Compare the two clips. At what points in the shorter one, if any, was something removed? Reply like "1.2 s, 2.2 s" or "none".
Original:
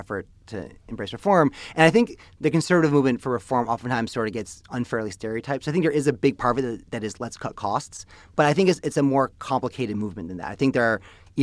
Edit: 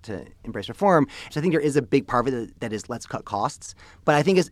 1.3 s